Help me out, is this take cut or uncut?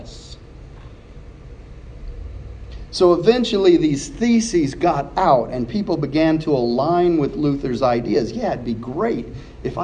uncut